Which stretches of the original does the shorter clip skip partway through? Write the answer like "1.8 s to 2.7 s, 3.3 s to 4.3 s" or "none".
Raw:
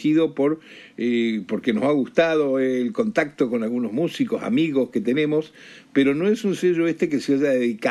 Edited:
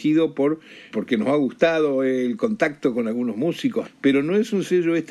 0.9 s to 1.5 s, 4.4 s to 5.8 s

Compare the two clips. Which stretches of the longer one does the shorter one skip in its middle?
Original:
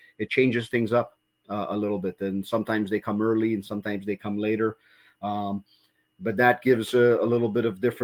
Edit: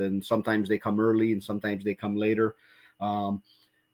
none

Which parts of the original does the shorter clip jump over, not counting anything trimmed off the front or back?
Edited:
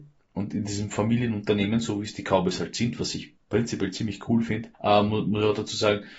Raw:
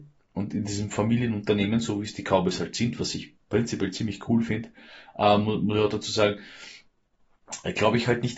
4.7 s to 5.1 s

